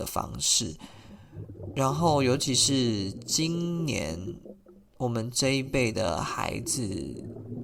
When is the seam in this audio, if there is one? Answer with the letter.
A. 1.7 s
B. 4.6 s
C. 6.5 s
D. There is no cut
D